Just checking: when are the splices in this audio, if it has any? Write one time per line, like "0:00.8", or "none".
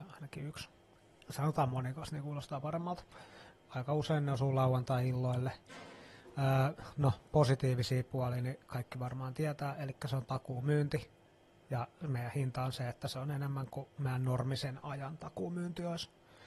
0:03.5